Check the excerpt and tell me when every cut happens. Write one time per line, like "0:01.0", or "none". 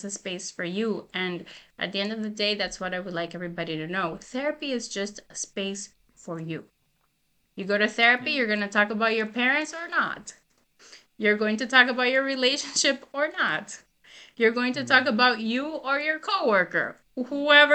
0:07.4